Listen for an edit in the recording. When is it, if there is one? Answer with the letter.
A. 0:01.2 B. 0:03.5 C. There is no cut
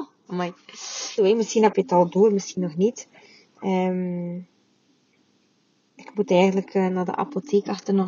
A